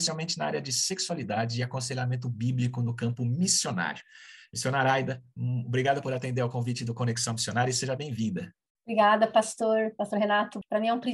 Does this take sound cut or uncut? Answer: uncut